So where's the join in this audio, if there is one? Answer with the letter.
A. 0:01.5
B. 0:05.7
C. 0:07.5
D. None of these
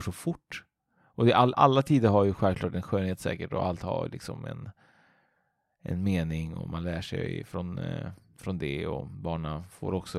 A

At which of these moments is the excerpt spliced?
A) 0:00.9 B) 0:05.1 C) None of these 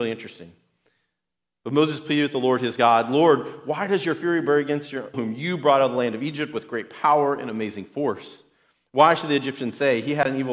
B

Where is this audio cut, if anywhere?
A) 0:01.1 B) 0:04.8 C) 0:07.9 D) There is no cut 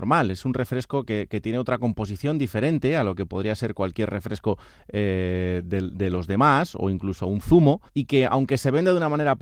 C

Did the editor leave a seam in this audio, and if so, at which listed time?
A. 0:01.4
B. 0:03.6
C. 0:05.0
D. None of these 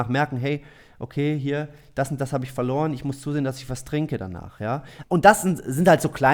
C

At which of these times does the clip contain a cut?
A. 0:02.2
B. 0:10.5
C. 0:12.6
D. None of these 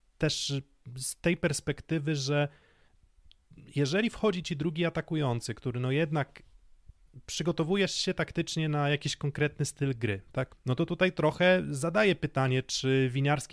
B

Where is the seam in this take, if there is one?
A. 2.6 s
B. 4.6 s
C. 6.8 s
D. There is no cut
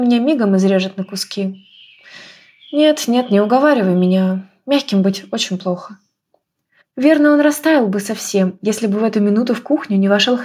C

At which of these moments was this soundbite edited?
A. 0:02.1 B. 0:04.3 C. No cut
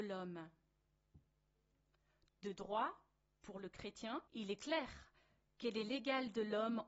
B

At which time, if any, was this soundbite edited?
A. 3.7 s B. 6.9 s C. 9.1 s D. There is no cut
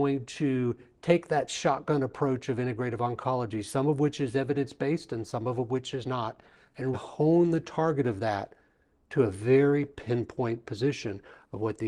B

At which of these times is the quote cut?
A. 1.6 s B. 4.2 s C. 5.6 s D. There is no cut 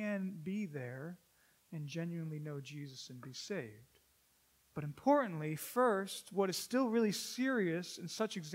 D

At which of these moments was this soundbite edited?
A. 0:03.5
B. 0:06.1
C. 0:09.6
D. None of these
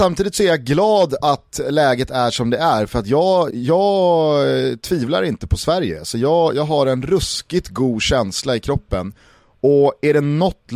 A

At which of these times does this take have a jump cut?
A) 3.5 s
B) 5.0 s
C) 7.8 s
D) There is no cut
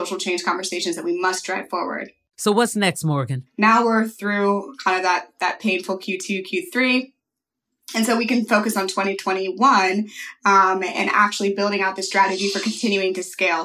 A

